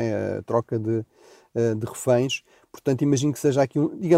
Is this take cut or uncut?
uncut